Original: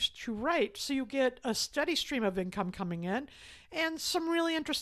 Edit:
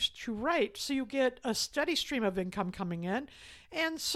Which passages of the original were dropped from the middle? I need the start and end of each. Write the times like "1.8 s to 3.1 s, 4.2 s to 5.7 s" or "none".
none